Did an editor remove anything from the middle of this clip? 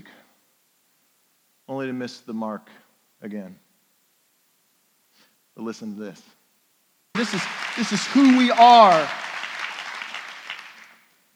yes; 1 cut; at 7.1 s

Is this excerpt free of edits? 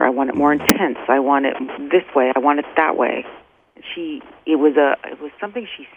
yes; 0 cuts

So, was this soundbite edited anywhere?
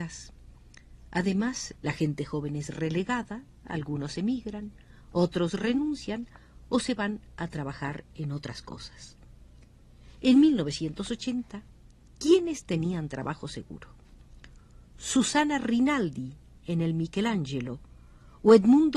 yes; 1 cut; at 1.8 s

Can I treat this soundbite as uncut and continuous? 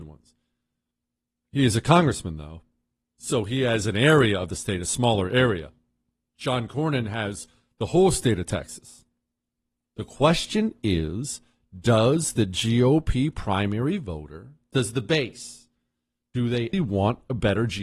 no; 2 cuts; at 9.8 s, 16.7 s

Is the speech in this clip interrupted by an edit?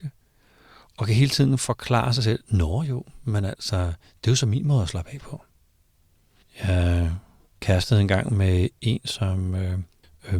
no; 0 cuts

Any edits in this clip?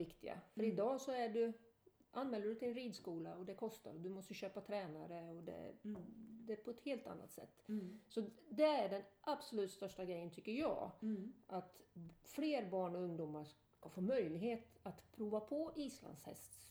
no; 0 cuts

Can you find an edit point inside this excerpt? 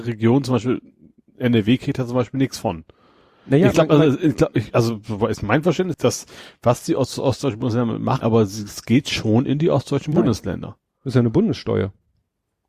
yes; 2 cuts; at 5.9 s, 8.2 s

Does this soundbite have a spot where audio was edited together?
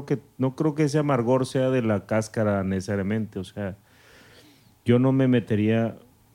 no; 0 cuts

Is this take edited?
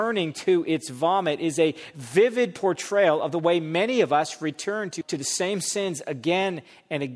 yes; 1 cut; at 5.0 s

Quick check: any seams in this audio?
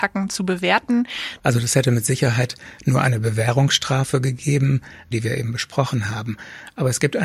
yes; 2 cuts; at 1.4 s, 5.1 s

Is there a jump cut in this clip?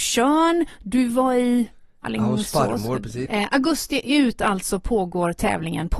yes; 1 cut; at 3.3 s

